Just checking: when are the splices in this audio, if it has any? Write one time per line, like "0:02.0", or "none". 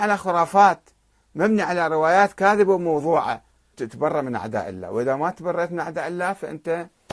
0:03.7